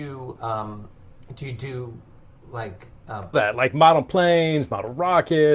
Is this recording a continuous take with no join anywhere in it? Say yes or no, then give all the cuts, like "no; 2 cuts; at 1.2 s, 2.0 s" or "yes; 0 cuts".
no; 1 cut; at 3.3 s